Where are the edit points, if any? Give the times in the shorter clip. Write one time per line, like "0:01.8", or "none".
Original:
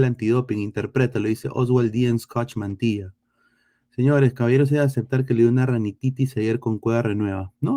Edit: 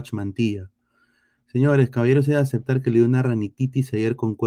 none

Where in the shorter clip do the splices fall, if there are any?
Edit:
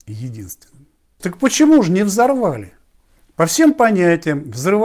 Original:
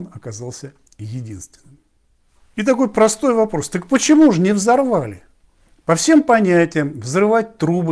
0:01.2

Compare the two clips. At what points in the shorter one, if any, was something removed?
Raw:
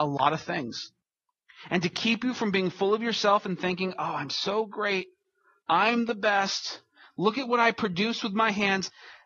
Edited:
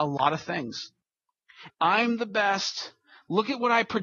0:01.7

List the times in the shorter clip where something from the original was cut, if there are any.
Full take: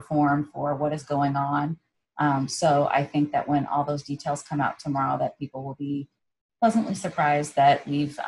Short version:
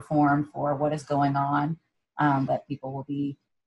0:02.5

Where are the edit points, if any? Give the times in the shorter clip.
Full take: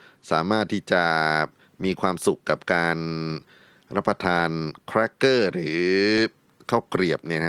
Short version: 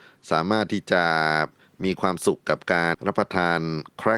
0:02.9

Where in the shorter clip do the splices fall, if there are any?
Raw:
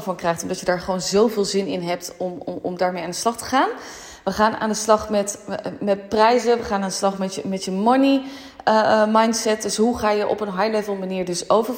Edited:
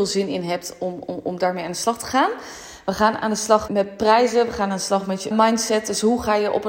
0:03.7
0:05.3

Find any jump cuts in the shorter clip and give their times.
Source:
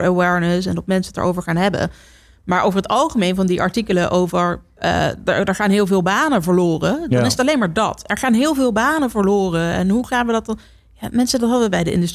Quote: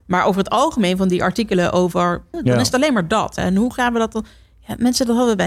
0:02.3
0:03.4

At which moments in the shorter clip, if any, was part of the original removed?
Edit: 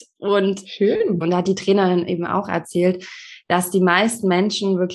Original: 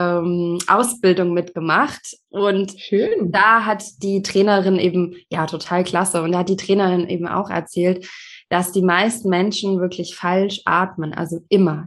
0:01.2

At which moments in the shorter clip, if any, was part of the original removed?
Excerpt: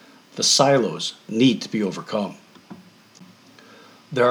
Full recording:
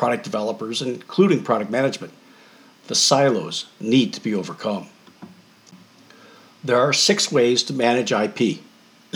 none

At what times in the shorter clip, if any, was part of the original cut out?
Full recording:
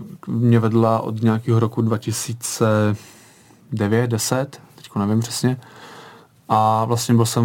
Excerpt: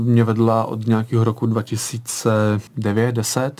0:02.7

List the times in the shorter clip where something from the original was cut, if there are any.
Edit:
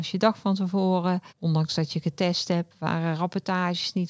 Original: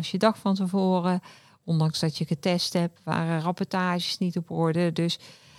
0:01.3

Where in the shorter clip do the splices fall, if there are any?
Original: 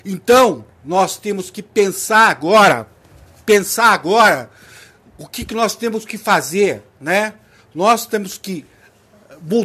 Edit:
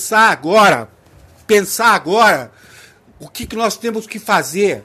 none

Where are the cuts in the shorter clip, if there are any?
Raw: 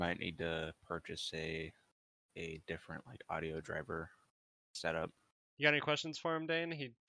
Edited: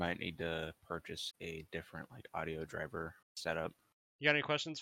0:01.3
0:03.2

